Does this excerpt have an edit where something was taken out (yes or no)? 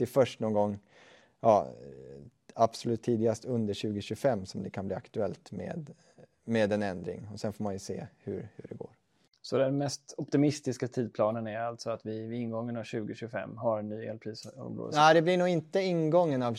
no